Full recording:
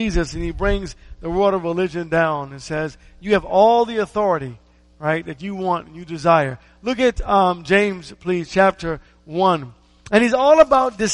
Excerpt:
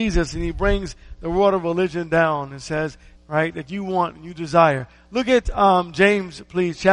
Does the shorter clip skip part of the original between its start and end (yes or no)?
yes